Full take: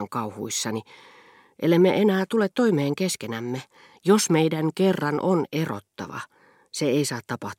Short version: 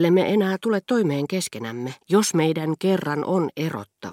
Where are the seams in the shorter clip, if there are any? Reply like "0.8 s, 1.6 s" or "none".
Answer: 2.0 s